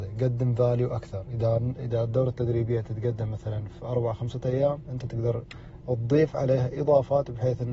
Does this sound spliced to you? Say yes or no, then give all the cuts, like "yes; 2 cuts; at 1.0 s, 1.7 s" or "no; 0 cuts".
no; 0 cuts